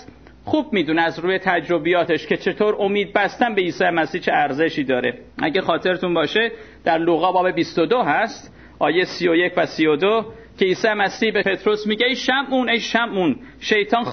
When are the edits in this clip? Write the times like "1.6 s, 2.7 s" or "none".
5.3 s